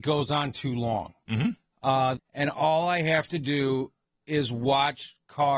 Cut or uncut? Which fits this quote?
cut